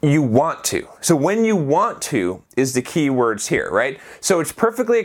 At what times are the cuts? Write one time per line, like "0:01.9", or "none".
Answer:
none